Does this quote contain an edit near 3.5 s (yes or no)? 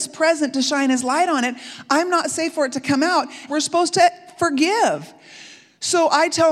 yes